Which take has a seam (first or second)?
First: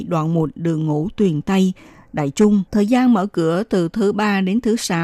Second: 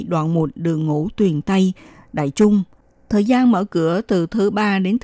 first